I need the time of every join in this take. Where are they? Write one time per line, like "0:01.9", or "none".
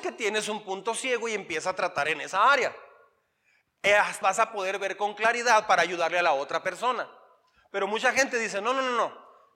0:04.2